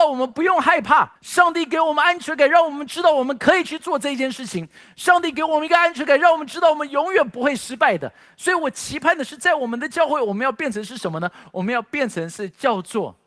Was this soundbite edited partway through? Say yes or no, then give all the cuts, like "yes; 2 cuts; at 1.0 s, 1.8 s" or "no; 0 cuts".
yes; 1 cut; at 1.2 s